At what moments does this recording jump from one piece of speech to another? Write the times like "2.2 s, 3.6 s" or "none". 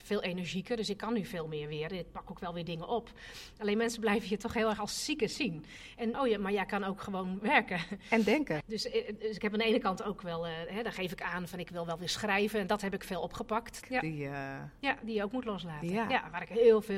6.1 s, 8.6 s, 13.8 s